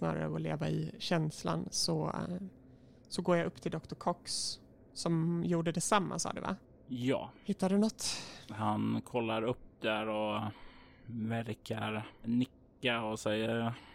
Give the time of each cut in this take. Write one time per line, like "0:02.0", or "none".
none